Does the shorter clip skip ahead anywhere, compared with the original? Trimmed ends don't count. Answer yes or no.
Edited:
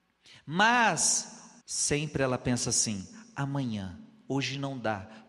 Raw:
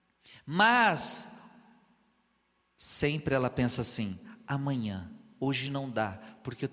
yes